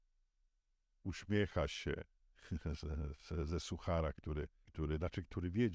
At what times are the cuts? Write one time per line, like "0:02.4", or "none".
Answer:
0:04.7